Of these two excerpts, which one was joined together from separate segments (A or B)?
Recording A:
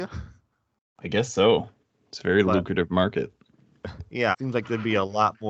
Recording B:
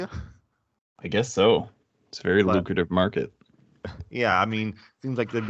A